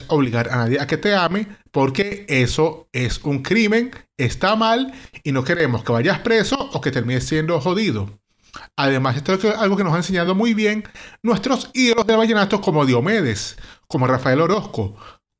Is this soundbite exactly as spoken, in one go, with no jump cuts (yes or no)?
yes